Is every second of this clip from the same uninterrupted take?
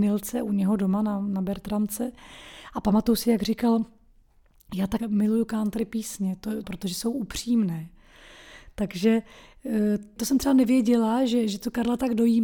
no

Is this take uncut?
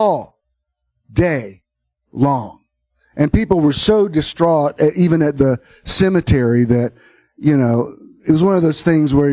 yes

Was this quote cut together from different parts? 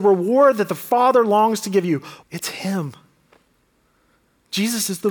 yes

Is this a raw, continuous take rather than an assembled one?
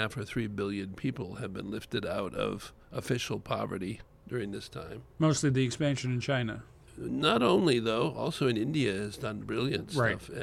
yes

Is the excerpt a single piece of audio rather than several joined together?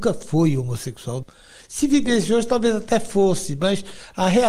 yes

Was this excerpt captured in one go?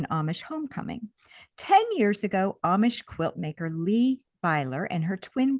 yes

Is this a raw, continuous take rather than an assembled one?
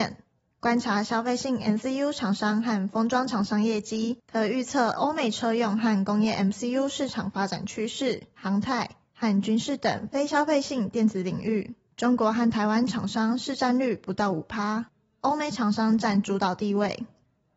no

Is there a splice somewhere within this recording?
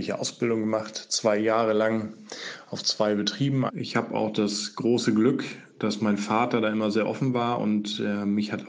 yes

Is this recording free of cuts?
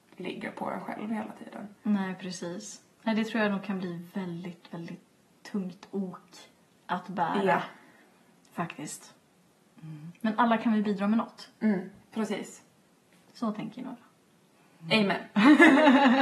yes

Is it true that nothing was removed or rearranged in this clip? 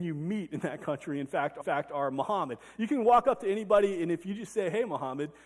yes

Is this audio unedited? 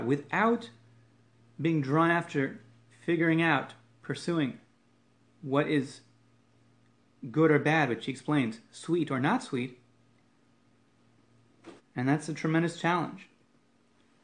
no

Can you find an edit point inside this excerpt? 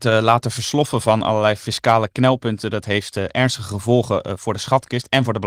no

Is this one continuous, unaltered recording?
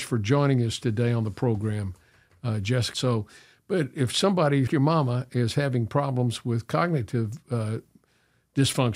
no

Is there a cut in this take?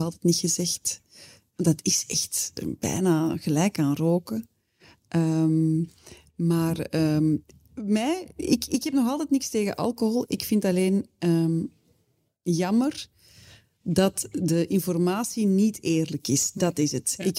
no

